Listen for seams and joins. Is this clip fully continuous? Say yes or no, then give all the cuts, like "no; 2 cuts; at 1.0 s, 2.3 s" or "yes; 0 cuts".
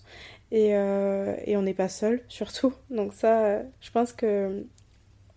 no; 1 cut; at 3.8 s